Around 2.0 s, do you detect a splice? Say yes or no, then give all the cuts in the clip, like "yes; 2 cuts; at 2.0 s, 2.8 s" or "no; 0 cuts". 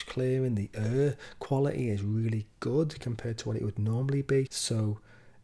no; 1 cut; at 4.5 s